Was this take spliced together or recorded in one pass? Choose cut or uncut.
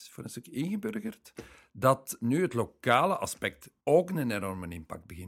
cut